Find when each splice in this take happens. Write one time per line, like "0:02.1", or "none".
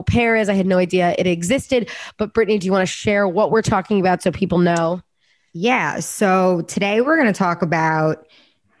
none